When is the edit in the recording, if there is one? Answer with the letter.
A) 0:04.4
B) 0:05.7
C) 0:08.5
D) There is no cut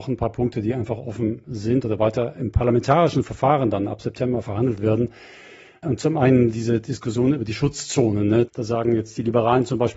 C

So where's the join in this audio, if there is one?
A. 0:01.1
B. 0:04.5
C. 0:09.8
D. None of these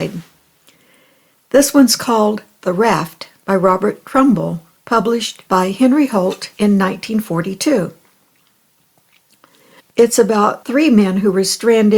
C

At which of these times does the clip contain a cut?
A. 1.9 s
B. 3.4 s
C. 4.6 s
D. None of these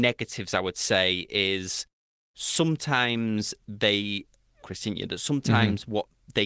C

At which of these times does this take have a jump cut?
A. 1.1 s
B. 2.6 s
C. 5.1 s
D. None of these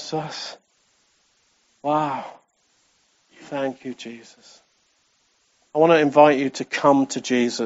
D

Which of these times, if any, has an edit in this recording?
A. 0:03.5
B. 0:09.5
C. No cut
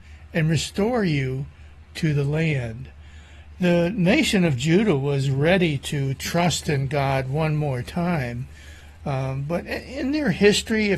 A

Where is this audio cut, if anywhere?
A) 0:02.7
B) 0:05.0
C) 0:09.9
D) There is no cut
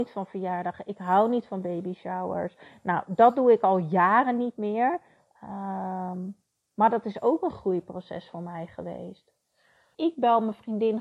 C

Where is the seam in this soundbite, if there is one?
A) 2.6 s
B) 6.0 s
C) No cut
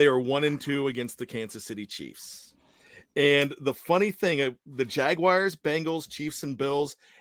C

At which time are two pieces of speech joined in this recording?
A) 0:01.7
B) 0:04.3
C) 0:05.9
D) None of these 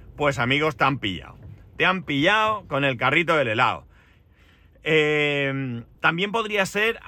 C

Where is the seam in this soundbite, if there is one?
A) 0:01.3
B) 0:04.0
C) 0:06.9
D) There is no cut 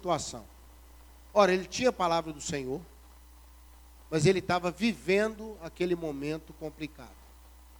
B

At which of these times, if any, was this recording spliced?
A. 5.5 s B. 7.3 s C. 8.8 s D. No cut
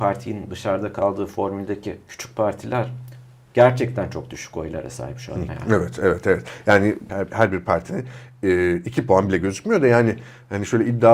A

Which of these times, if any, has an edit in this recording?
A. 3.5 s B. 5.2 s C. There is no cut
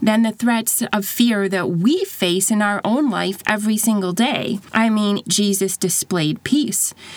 B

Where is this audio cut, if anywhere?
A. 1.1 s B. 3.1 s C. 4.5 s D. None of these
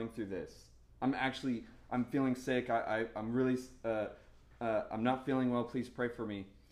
D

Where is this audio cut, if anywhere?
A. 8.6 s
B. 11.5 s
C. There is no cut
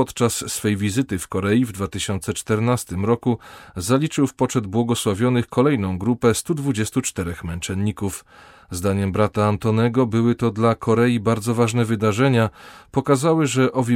C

